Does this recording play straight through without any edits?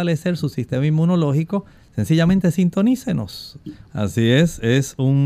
no; 1 cut; at 3.8 s

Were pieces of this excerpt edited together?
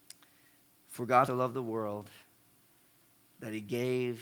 yes; 1 cut; at 1.3 s

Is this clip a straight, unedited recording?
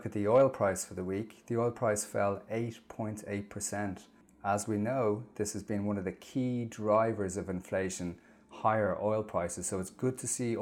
yes; 0 cuts

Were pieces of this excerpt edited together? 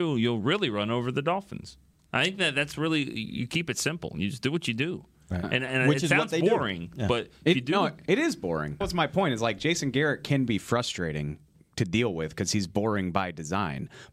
yes; 1 cut; at 8.8 s

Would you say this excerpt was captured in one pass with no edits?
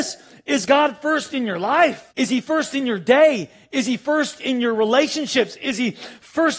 no; 1 cut; at 2.1 s

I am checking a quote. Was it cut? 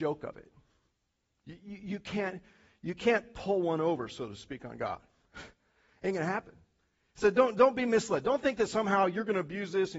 no; 0 cuts

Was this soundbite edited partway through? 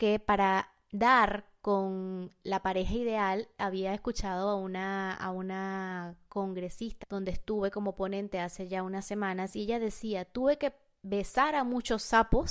yes; 1 cut; at 7.0 s

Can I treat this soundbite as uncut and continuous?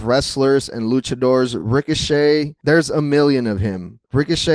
yes; 0 cuts

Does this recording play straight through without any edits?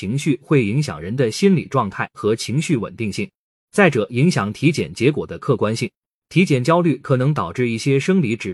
yes; 0 cuts

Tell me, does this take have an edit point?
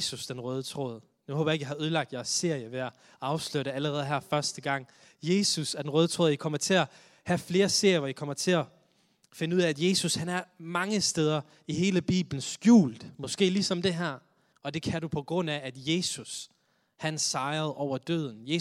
yes; 1 cut; at 14.5 s

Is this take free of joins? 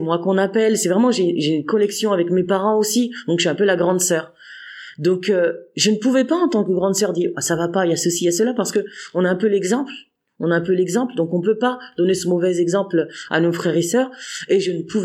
yes; 0 cuts

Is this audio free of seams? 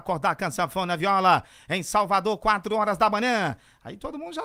yes; 0 cuts

